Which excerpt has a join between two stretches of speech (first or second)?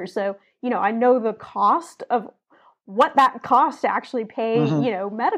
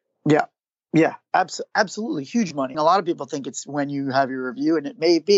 second